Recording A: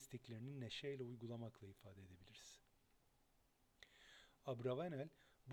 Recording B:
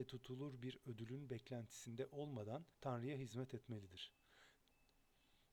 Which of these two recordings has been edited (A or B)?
B